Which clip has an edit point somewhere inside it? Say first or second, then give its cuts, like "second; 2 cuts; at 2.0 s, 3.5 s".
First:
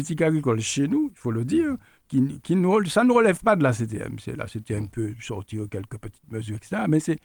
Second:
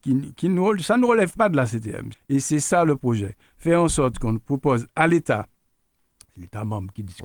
second; 1 cut; at 2.1 s